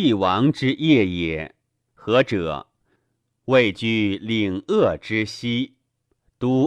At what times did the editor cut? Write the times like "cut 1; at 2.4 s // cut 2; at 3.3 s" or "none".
cut 1; at 1.9 s